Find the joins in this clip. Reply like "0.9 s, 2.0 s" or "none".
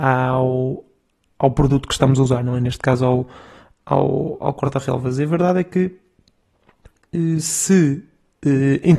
none